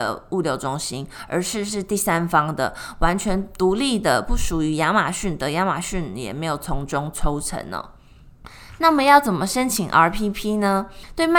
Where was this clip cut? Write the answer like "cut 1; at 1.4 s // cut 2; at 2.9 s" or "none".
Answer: none